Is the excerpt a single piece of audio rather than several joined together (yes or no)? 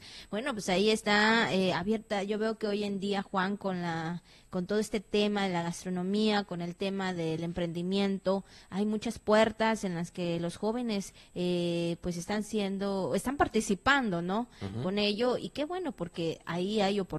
yes